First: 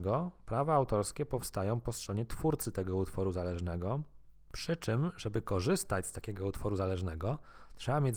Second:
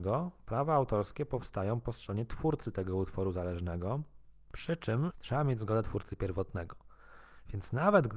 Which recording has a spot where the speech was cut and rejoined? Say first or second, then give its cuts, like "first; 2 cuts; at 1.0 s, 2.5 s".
second; 1 cut; at 5.1 s